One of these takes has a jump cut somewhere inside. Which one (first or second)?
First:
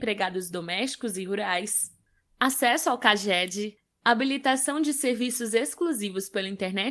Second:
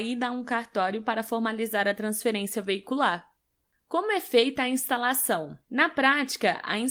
second